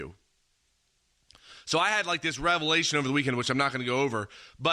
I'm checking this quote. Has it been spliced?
no; 0 cuts

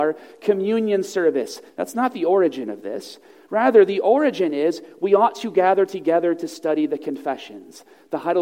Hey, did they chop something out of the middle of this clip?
yes; 1 cut; at 1.7 s

